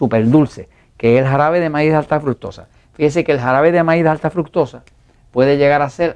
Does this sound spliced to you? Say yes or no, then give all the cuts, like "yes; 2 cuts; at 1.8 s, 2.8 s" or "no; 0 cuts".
no; 0 cuts